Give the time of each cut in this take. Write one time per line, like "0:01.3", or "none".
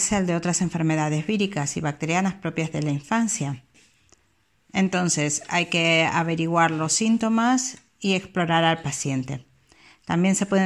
none

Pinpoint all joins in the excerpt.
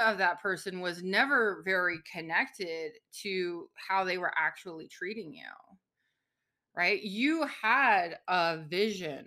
none

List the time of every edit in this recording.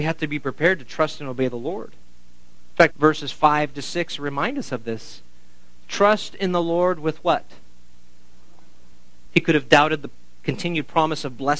0:02.9
0:09.3

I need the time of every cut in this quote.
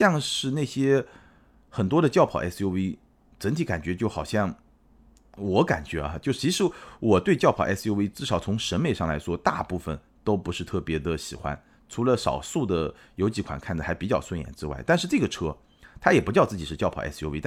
none

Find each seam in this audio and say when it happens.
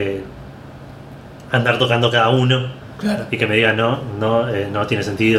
none

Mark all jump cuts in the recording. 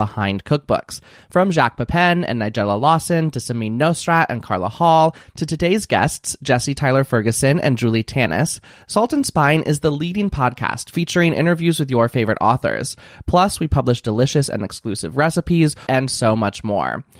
0:15.9

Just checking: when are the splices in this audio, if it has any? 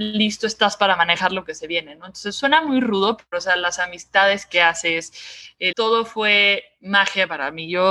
0:03.3
0:05.7

